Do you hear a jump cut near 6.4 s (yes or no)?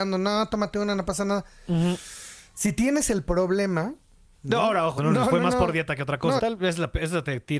yes